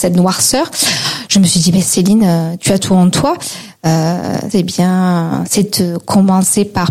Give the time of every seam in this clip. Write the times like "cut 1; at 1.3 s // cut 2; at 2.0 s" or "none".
cut 1; at 4.5 s